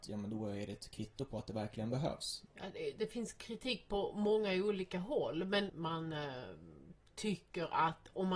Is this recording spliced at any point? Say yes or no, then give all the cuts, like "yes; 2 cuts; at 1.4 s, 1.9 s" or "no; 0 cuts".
yes; 2 cuts; at 2.5 s, 5.7 s